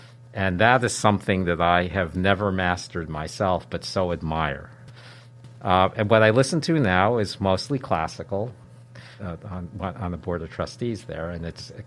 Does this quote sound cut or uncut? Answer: cut